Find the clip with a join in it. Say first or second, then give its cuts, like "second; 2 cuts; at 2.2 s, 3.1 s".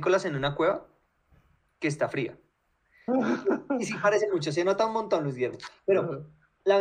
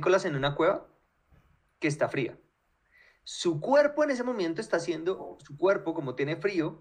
first; 1 cut; at 3.1 s